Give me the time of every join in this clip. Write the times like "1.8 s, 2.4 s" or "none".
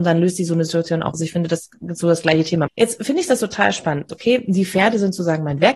1.1 s, 2.7 s, 4.1 s

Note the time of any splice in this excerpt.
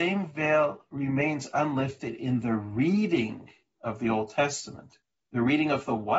none

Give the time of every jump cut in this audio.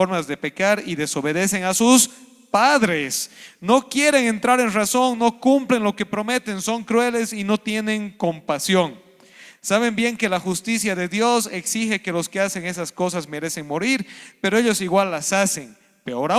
none

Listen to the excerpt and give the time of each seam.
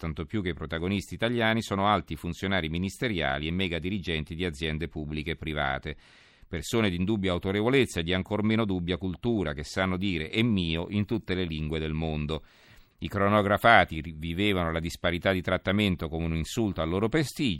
12.9 s

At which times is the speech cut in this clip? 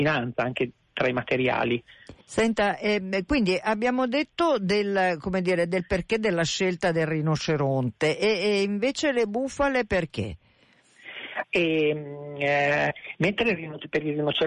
2.2 s, 11.4 s

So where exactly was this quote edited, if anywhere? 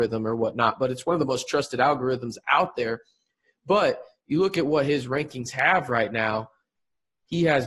none

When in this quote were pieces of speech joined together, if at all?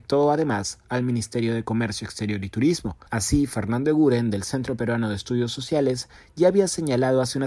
3.1 s

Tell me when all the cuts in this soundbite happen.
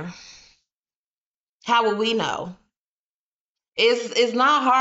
none

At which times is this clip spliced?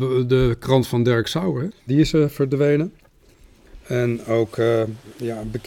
1.7 s

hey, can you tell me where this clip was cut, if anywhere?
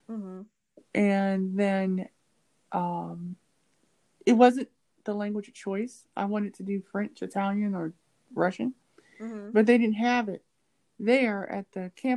none

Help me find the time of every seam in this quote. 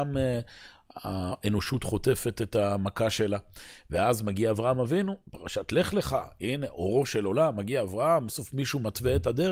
8.3 s

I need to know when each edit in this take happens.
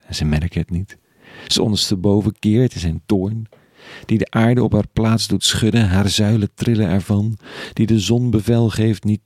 none

